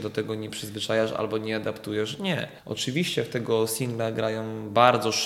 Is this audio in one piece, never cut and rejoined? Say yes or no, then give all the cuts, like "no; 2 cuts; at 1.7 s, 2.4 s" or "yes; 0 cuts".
yes; 0 cuts